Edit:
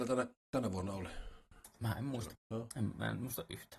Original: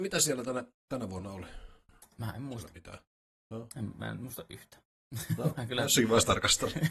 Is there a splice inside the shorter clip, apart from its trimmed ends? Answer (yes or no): yes